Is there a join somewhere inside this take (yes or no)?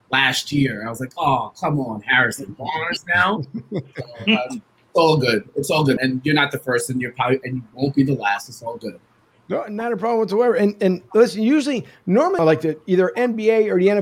yes